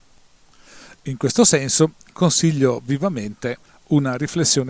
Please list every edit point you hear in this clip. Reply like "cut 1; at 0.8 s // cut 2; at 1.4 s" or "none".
none